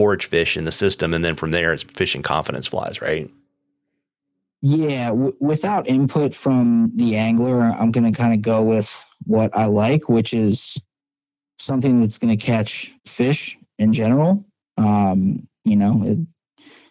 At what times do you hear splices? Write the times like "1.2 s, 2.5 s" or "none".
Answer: 1.8 s, 13.0 s